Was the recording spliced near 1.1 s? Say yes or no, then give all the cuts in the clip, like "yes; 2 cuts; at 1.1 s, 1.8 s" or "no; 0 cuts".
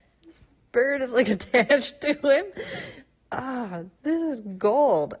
no; 1 cut; at 3.9 s